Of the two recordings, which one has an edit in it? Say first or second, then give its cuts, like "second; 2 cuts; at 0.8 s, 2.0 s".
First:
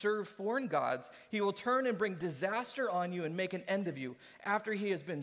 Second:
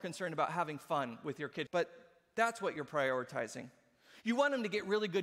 second; 1 cut; at 1.7 s